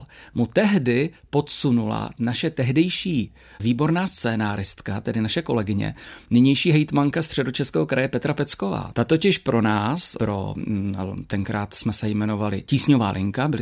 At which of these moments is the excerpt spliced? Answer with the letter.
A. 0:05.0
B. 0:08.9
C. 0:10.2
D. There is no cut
B